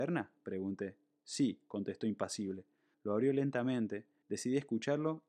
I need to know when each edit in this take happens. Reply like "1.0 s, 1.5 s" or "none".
2.9 s, 4.2 s